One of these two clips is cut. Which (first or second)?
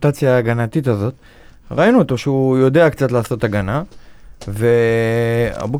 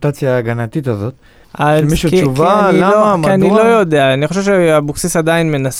second